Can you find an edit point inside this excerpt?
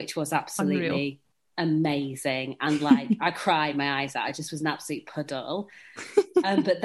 no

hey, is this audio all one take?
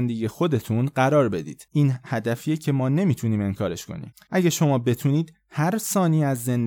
no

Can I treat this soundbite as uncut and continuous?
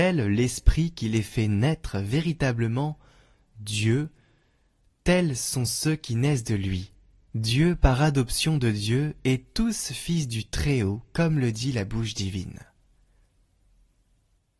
yes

